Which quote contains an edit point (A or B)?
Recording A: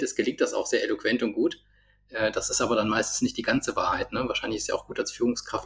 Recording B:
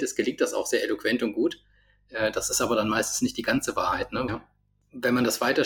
B